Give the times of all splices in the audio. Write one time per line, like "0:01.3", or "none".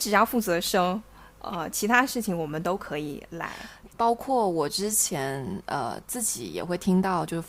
0:03.9